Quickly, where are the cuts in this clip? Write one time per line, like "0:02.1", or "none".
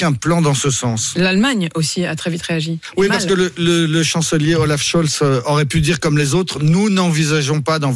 none

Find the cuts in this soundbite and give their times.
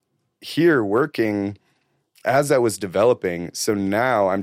none

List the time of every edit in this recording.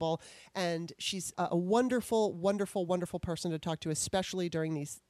0:01.3

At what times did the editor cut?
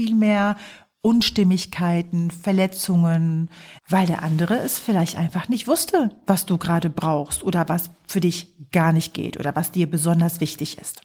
0:03.8

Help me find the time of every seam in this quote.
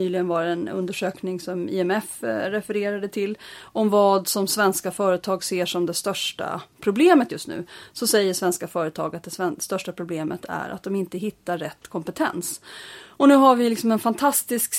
none

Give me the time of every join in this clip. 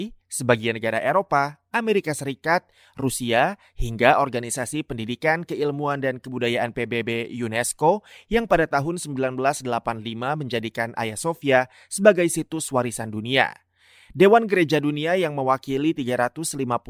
none

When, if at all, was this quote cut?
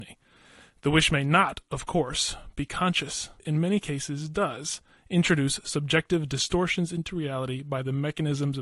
0:03.4

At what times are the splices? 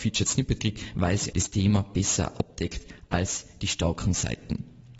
0:01.3

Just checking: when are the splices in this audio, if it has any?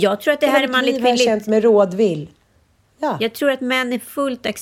none

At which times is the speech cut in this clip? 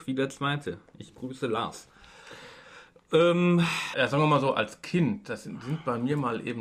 0:03.9

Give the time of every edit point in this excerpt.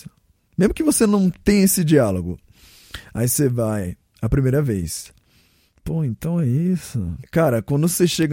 0:07.2

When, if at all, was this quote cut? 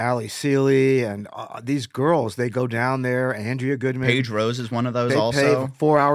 none

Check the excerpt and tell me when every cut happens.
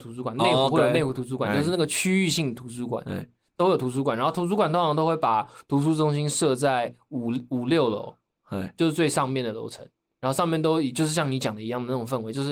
none

